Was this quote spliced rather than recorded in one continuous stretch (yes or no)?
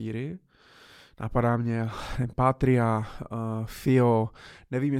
no